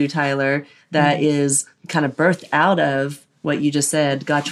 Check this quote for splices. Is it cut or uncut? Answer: uncut